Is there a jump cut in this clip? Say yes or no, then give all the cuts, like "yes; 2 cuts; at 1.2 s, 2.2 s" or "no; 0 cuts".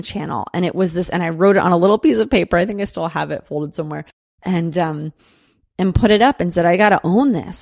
no; 0 cuts